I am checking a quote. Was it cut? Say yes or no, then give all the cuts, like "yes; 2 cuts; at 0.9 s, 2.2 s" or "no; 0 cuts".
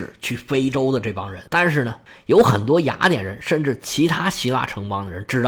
yes; 1 cut; at 1.5 s